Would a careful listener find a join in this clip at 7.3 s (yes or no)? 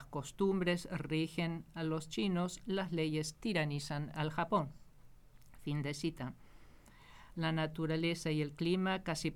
yes